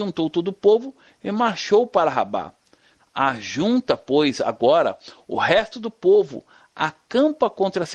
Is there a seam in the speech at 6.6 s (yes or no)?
no